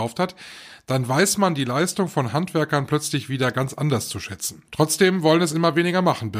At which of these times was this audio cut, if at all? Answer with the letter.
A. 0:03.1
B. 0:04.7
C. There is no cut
B